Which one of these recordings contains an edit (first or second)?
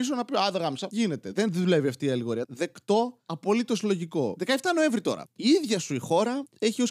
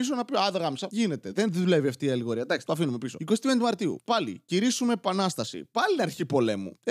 first